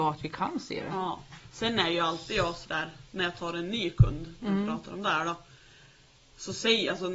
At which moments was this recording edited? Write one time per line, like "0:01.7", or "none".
none